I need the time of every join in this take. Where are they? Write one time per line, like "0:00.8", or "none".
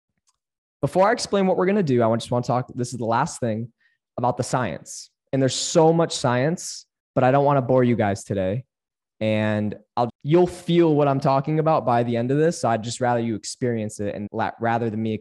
0:10.1
0:14.3